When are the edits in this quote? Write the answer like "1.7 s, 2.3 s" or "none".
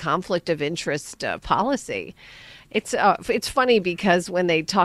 none